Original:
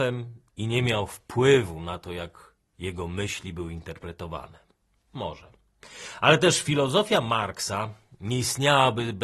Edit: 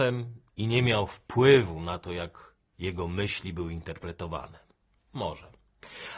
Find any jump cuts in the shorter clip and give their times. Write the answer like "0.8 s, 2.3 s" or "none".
none